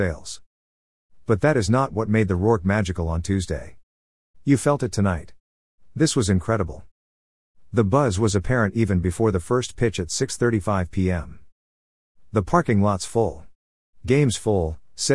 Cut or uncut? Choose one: cut